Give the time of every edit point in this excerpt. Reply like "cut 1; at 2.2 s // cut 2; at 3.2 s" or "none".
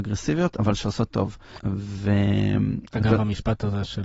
cut 1; at 1.6 s